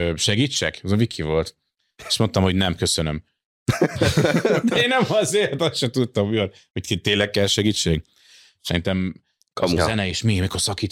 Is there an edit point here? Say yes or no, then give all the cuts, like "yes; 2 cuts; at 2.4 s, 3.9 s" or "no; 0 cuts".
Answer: yes; 2 cuts; at 8.6 s, 9.8 s